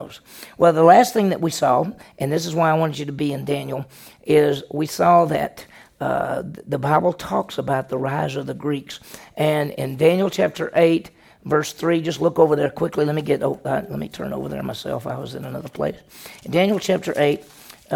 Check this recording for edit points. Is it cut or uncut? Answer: uncut